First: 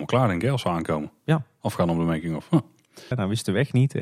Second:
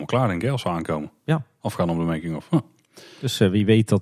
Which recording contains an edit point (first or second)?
first